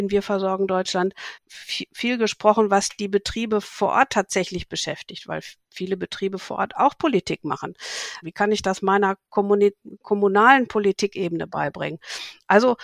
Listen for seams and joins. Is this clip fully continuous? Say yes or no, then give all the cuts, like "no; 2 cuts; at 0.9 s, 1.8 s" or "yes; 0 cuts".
no; 2 cuts; at 1.4 s, 8.2 s